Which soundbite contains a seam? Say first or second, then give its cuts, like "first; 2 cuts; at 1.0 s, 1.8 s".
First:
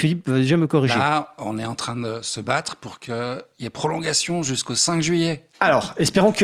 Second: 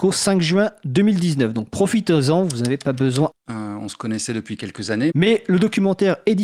second; 2 cuts; at 3.3 s, 5.1 s